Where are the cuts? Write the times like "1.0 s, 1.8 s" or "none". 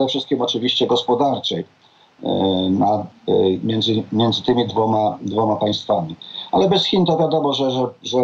none